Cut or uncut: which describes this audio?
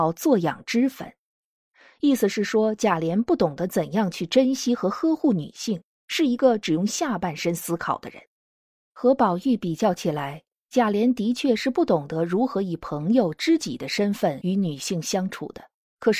uncut